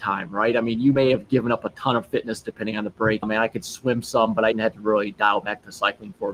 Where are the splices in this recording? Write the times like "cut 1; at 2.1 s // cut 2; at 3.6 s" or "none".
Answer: cut 1; at 3.2 s // cut 2; at 4.5 s